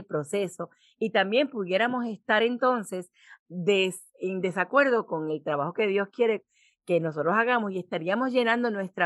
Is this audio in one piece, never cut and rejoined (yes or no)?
yes